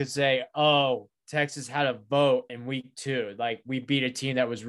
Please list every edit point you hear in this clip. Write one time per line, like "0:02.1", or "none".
0:02.5